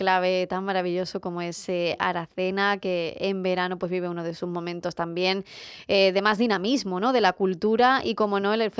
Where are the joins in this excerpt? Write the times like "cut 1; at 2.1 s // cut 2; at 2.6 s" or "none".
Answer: none